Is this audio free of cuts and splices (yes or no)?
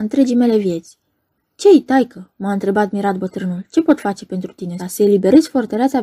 no